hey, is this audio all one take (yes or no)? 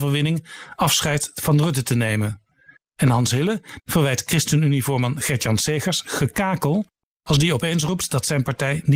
no